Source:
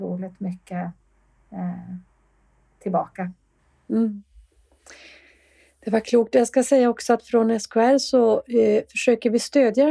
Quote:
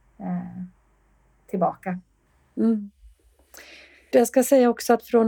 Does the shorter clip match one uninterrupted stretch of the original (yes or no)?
no